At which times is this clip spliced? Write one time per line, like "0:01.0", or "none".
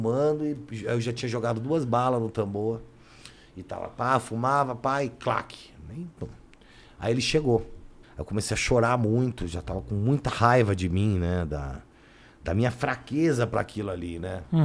0:08.0